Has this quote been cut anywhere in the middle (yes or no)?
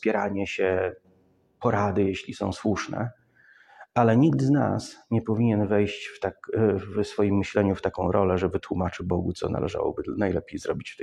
no